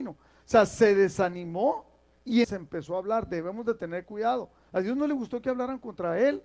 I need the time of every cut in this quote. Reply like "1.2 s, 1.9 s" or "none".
2.4 s, 4.6 s